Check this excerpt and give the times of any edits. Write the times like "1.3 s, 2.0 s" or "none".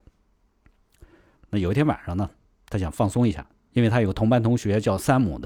1.4 s, 3.5 s

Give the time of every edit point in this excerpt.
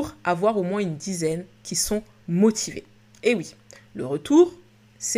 none

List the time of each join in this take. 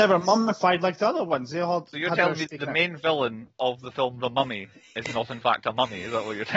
2.5 s

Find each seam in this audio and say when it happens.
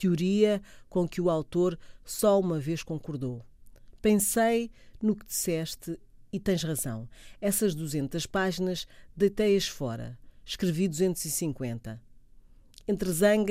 none

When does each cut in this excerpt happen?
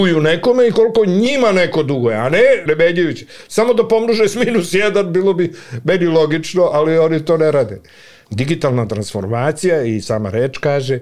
2.7 s, 8.2 s

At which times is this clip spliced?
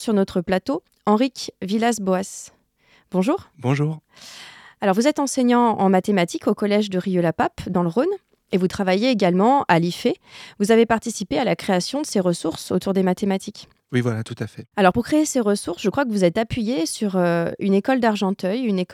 none

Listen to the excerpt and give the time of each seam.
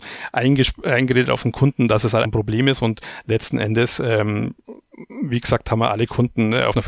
2.2 s

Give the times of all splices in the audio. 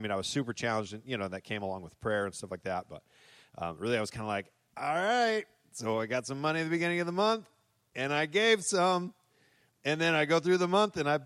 none

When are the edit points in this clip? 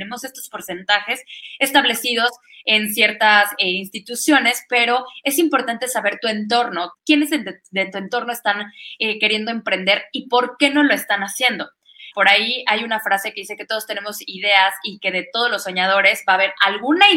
6.9 s, 12.1 s

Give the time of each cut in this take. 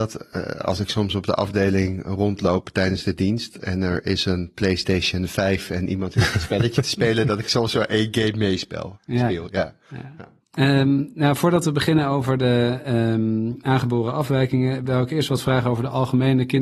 10.4 s

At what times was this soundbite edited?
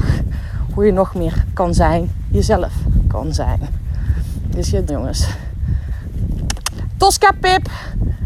4.9 s

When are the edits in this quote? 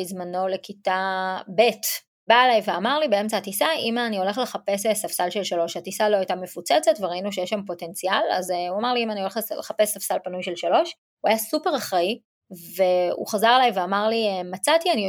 none

